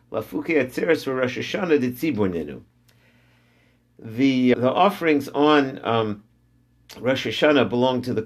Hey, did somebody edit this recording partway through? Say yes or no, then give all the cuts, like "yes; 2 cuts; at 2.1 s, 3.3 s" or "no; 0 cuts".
yes; 1 cut; at 4.5 s